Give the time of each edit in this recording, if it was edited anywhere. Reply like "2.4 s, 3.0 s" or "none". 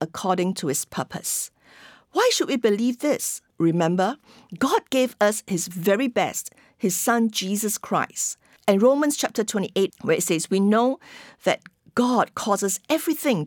3.5 s, 8.6 s, 9.9 s